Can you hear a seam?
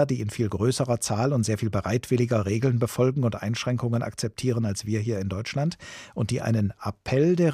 no; 0 cuts

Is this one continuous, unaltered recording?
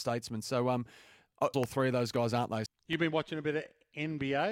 no; 2 cuts; at 1.5 s, 2.7 s

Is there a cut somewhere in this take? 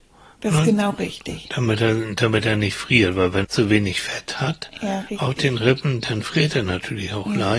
yes; 1 cut; at 3.4 s

